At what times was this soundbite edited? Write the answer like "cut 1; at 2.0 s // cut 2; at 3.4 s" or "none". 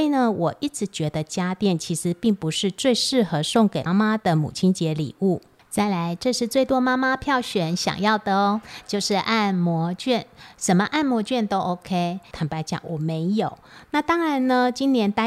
cut 1; at 3.9 s // cut 2; at 12.3 s